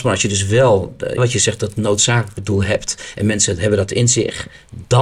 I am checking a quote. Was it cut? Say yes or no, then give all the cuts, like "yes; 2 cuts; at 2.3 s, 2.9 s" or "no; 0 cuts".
yes; 1 cut; at 1.2 s